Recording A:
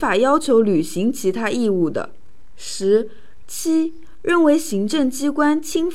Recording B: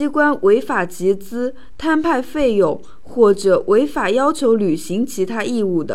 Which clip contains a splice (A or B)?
A